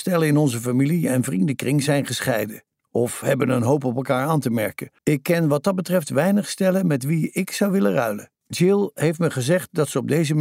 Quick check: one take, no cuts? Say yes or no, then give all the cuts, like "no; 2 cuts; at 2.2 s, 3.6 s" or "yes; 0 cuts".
no; 2 cuts; at 5.0 s, 8.4 s